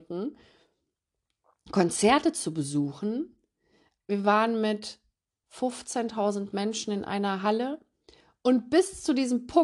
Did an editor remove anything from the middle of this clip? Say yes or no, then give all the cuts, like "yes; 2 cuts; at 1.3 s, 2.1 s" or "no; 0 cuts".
yes; 2 cuts; at 4.0 s, 5.4 s